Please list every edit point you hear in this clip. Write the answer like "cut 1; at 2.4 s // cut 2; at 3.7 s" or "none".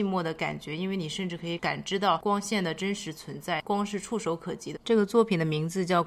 cut 1; at 4.8 s